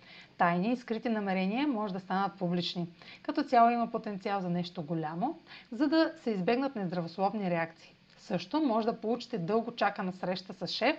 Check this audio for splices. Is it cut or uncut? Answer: cut